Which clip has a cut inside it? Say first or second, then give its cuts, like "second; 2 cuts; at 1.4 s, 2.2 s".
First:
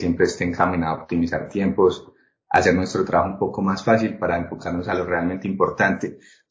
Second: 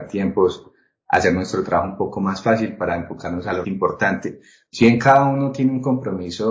second; 1 cut; at 3.6 s